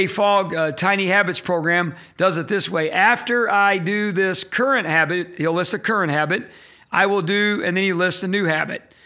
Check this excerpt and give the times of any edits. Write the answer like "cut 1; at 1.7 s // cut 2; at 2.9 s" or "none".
none